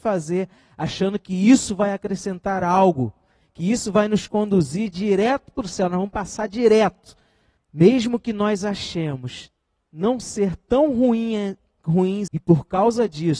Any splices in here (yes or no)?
yes